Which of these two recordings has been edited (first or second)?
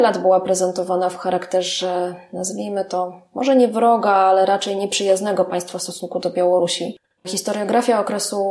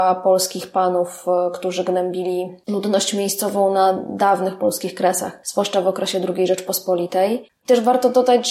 second